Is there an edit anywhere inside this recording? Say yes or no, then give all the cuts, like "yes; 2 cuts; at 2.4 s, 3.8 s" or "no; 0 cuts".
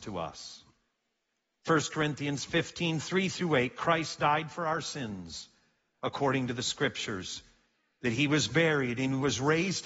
no; 0 cuts